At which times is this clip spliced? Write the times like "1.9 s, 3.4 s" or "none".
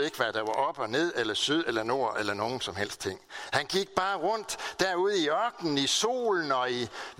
none